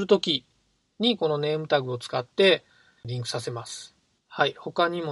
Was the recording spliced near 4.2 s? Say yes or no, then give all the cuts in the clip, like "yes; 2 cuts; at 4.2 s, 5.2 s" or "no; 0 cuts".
yes; 1 cut; at 4.2 s